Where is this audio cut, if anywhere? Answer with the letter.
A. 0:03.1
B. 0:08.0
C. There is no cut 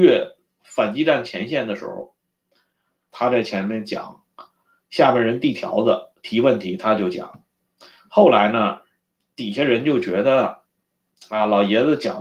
A